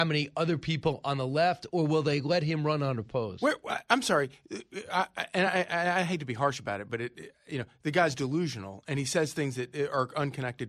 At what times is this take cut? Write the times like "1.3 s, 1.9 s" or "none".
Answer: none